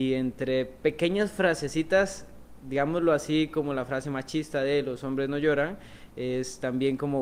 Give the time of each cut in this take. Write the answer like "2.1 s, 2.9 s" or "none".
none